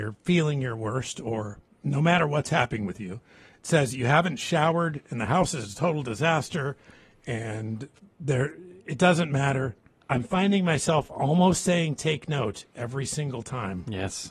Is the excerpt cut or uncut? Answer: cut